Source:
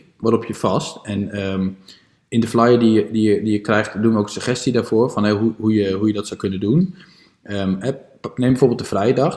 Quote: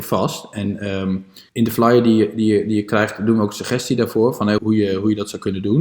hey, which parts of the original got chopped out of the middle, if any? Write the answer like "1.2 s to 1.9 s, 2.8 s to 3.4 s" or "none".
2.0 s to 2.3 s, 5.3 s to 5.6 s